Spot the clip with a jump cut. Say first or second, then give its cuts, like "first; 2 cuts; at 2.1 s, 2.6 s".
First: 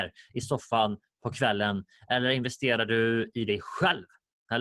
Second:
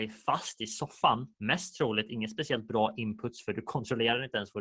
second; 1 cut; at 1.3 s